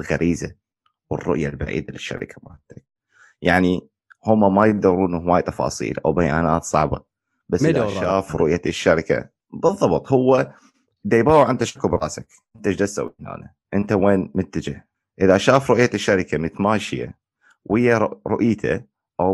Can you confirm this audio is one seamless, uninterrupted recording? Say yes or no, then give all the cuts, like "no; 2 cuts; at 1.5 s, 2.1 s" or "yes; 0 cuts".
yes; 0 cuts